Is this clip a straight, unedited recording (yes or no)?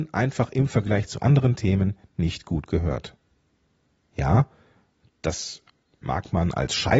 yes